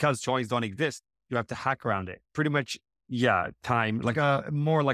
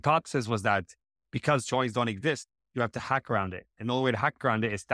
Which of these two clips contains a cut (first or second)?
first